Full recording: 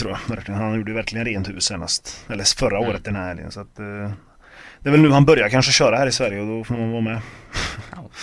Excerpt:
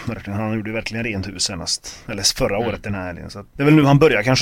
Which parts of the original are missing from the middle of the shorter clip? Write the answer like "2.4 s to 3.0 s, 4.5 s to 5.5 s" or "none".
3.7 s to 4.8 s